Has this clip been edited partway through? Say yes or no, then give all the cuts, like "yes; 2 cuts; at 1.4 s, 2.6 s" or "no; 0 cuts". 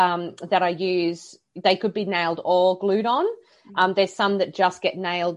no; 0 cuts